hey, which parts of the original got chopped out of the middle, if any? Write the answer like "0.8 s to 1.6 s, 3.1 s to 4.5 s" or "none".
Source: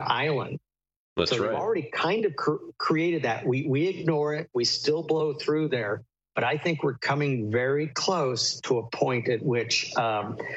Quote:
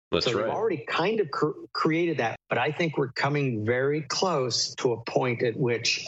3.4 s to 6.2 s